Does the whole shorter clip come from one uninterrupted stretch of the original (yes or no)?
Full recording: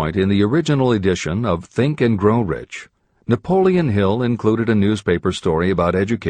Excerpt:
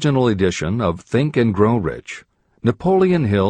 yes